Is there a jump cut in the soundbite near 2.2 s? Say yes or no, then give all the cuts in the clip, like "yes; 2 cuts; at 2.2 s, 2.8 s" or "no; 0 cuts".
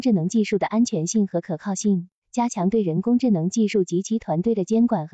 yes; 1 cut; at 2.2 s